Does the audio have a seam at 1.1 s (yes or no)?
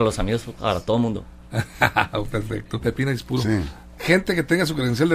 no